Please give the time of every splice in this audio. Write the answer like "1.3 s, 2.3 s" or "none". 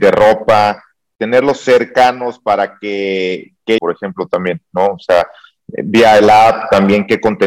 3.8 s